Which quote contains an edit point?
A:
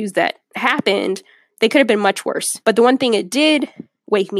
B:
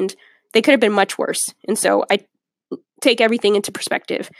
A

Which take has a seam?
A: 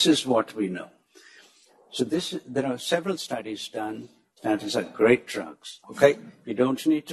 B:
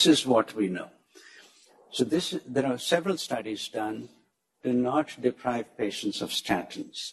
A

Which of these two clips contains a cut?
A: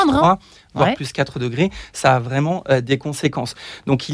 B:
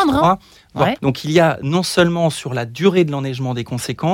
B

